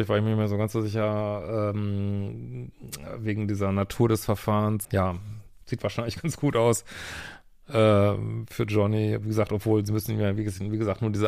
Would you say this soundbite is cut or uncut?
cut